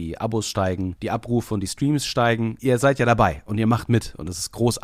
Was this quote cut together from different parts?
no; 0 cuts

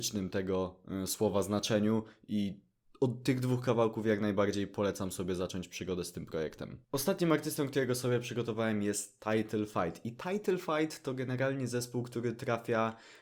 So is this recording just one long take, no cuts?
yes; 0 cuts

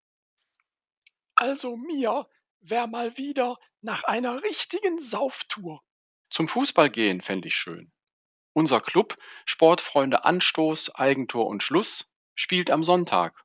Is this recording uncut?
no; 1 cut; at 6.2 s

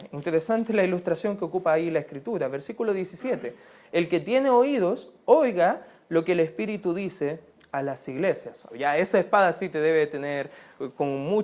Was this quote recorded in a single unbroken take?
no; 1 cut; at 8.7 s

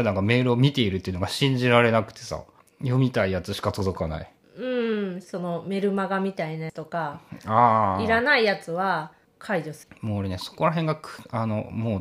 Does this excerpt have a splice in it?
yes; 1 cut; at 5.2 s

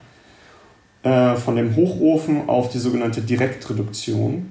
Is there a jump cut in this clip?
no; 0 cuts

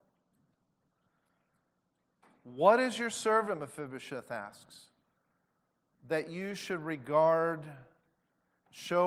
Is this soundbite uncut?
yes; 0 cuts

